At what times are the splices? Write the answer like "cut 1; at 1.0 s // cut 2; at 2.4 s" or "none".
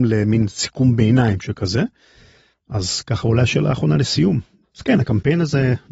cut 1; at 4.6 s